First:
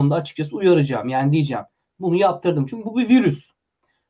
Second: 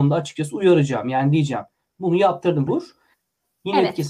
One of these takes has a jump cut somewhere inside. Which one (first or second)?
second